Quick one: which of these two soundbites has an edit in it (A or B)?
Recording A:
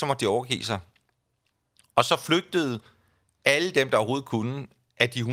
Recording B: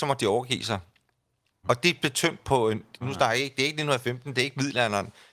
B